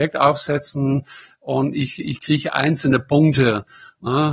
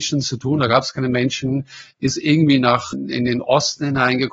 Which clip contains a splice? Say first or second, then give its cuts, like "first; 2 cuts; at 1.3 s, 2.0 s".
second; 1 cut; at 2.9 s